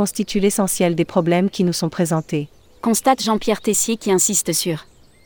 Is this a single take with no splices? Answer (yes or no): yes